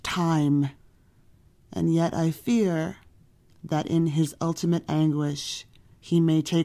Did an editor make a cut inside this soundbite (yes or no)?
no